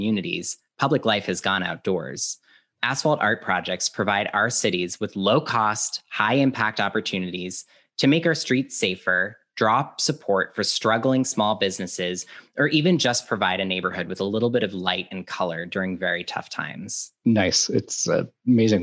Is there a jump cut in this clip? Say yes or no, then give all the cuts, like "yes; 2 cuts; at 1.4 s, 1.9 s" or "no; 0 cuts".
no; 0 cuts